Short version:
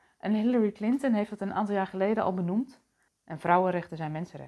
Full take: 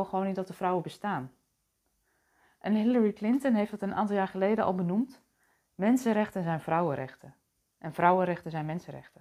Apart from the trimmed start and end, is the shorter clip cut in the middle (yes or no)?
yes